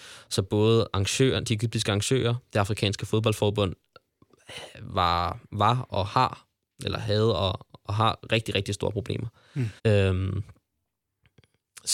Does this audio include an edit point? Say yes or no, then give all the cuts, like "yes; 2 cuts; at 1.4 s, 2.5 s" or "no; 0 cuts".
yes; 1 cut; at 9.8 s